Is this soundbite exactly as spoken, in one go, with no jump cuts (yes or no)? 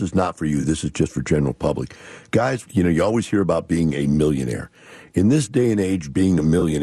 no